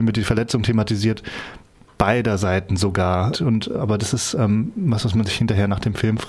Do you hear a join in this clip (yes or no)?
yes